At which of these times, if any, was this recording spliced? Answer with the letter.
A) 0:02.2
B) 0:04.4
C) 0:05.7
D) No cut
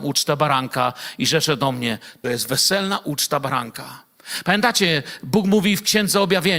A